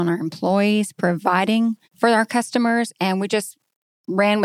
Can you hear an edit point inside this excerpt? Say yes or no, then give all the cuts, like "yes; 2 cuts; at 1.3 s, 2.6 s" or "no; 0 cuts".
yes; 1 cut; at 1.8 s